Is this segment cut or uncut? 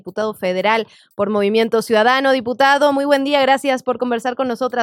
uncut